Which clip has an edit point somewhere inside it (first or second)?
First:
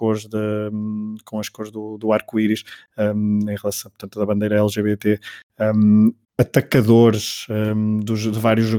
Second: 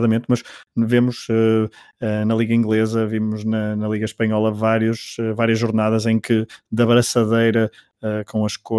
first